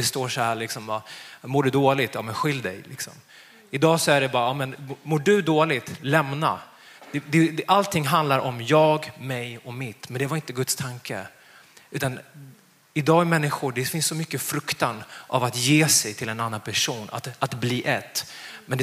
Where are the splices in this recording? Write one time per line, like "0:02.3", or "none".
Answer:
none